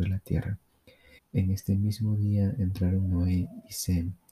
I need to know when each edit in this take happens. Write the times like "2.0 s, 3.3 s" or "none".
1.2 s